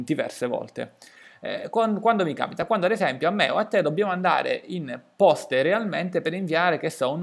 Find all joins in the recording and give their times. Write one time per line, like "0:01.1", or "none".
none